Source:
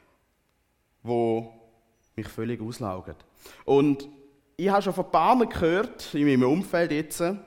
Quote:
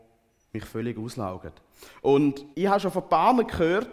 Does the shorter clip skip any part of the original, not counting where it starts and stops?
yes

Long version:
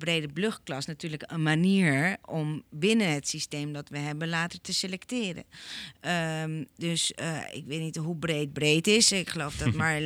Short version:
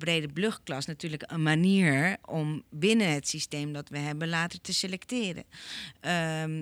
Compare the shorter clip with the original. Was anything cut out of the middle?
no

